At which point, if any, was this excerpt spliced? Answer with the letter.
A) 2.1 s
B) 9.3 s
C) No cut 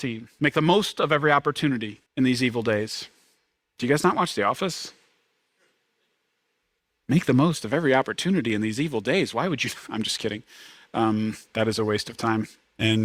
A